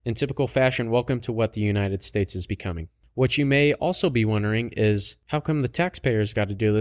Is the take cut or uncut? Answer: uncut